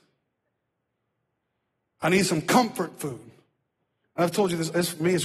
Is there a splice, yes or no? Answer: no